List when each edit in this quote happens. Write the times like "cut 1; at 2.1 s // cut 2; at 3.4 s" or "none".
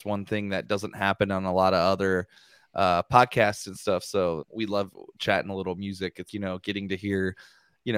cut 1; at 4.4 s // cut 2; at 6.3 s